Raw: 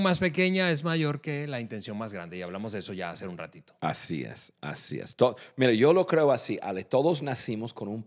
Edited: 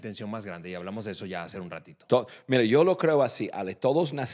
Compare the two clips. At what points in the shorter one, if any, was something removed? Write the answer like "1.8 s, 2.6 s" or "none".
2.1 s